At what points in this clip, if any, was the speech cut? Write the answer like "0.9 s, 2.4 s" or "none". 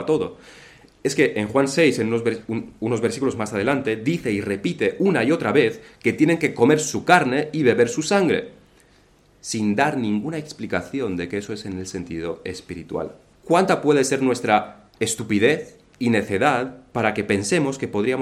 13.3 s, 14.9 s